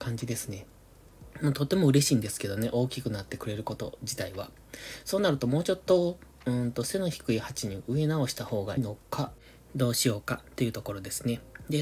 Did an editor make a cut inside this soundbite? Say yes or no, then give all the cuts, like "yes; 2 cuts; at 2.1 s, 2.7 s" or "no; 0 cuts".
yes; 1 cut; at 8.8 s